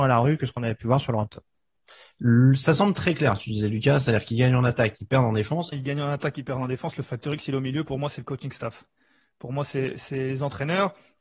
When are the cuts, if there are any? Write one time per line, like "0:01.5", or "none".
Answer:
0:05.7